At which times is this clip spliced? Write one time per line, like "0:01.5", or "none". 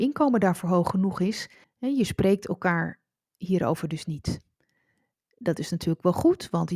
0:01.6